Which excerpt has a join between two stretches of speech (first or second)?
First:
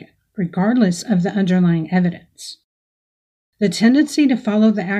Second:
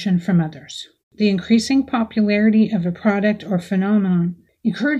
second